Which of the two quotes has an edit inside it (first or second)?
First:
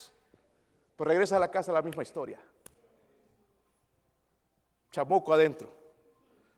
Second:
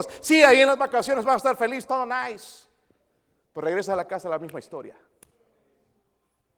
second